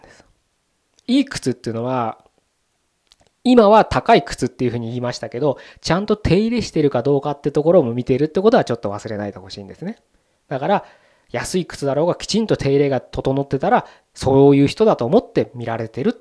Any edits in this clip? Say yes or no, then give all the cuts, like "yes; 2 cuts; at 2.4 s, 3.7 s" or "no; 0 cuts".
no; 0 cuts